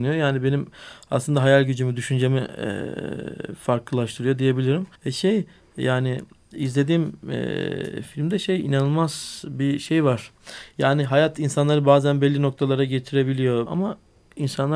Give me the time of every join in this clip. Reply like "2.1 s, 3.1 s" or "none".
5.0 s, 13.7 s